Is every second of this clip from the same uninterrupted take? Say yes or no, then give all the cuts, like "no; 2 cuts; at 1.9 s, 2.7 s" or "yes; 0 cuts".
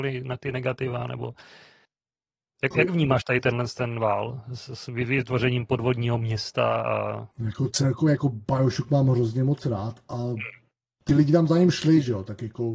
no; 1 cut; at 7.3 s